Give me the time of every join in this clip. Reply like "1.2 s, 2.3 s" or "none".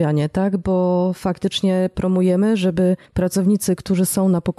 3.1 s